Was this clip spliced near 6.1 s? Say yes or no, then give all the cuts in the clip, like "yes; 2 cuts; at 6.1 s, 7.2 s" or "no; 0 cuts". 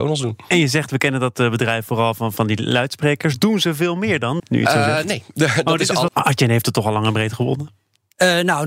yes; 2 cuts; at 4.4 s, 6.1 s